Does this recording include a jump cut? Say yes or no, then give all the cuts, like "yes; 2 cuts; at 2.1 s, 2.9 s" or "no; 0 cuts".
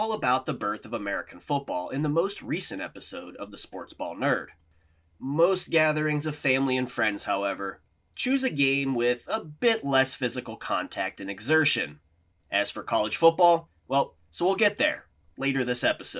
yes; 2 cuts; at 12.4 s, 14.2 s